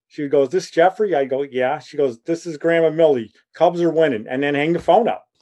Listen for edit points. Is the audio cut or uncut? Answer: uncut